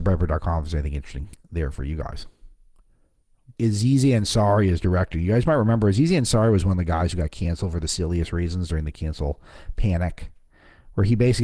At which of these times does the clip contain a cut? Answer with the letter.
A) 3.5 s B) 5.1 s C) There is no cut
A